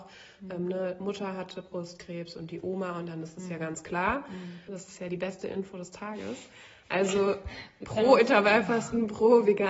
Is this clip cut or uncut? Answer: cut